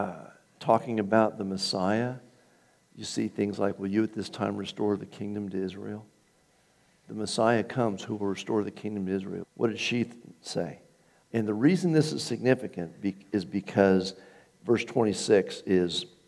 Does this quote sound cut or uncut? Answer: cut